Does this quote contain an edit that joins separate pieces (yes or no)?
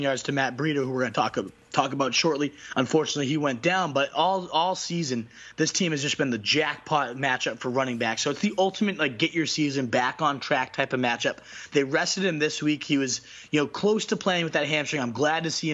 no